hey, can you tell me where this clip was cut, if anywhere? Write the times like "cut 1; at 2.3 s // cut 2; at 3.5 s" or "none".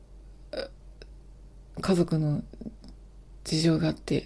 none

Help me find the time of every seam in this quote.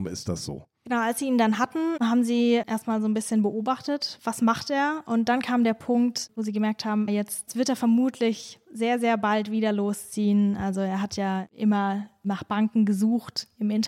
cut 1; at 7.1 s

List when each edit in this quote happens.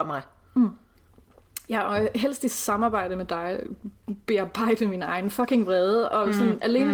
none

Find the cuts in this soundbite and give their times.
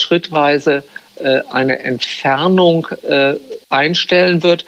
cut 1; at 3.6 s

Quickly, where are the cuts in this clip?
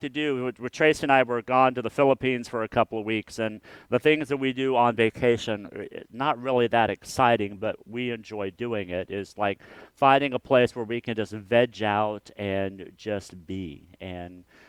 none

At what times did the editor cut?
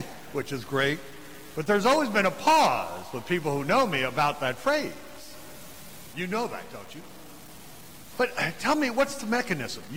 cut 1; at 6.1 s // cut 2; at 8.1 s

